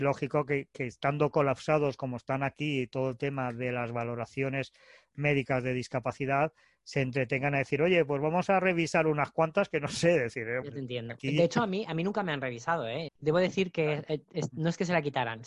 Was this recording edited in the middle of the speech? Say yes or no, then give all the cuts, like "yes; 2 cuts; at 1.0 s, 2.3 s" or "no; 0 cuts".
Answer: yes; 2 cuts; at 10.6 s, 13.1 s